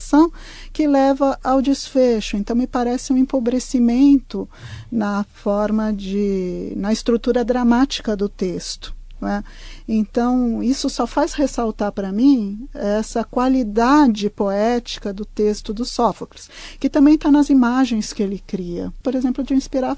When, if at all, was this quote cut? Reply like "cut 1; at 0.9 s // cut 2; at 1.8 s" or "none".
cut 1; at 19.0 s